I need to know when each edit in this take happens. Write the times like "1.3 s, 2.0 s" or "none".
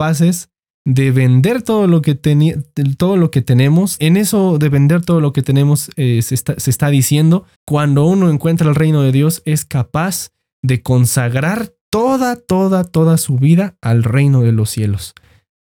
4.0 s, 7.5 s